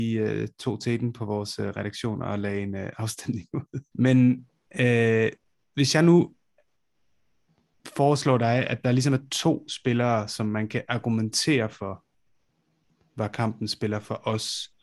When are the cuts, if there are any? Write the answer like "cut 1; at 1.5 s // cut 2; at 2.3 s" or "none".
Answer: cut 1; at 3.9 s